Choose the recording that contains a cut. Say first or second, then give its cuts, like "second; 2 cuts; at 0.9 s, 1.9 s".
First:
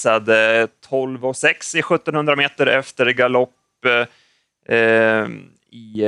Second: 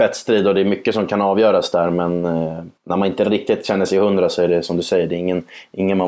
second; 1 cut; at 2.8 s